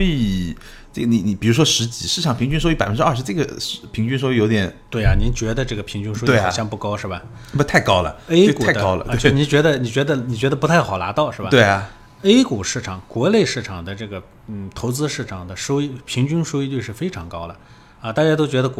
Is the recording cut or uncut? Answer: uncut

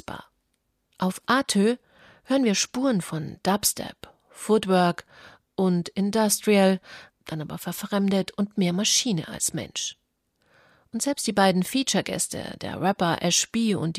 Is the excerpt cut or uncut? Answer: cut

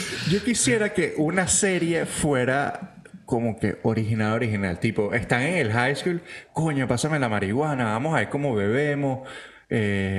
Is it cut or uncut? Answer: uncut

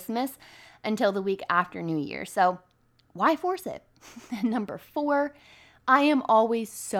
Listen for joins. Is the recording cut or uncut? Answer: uncut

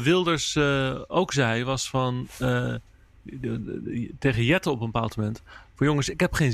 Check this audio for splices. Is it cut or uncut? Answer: uncut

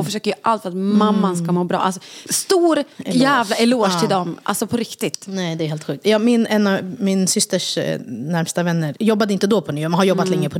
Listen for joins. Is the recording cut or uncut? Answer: uncut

